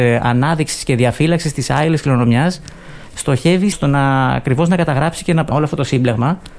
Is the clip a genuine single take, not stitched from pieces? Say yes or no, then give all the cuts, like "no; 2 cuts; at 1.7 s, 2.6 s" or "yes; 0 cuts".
no; 2 cuts; at 3.7 s, 5.5 s